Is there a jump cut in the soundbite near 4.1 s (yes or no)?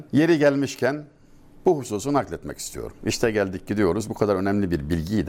no